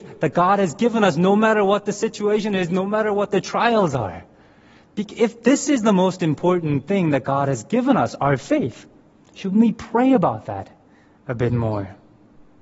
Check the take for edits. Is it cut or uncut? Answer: uncut